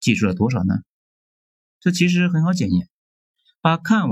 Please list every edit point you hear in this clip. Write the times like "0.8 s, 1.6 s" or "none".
none